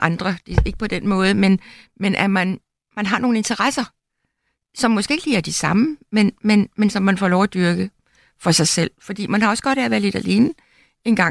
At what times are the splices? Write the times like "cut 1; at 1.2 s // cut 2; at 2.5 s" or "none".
none